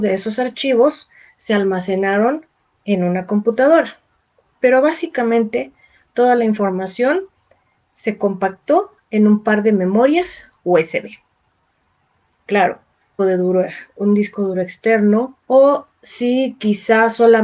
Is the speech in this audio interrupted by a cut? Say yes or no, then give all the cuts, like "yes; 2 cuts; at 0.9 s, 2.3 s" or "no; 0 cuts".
yes; 2 cuts; at 13.2 s, 15.4 s